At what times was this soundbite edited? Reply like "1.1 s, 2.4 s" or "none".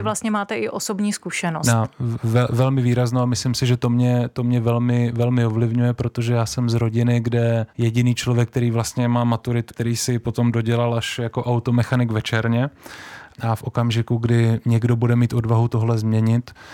7.7 s, 9.7 s, 13.3 s

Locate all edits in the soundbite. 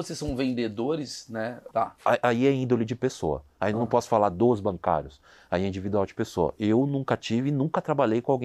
1.7 s

